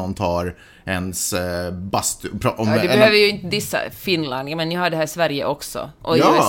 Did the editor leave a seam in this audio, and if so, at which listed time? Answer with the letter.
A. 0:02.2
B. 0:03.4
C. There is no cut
C